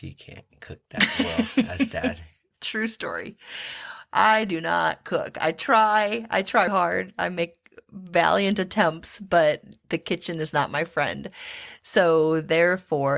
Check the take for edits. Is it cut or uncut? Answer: cut